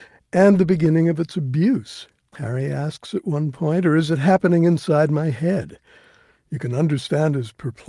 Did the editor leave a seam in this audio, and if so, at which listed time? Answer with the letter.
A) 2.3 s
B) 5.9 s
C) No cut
A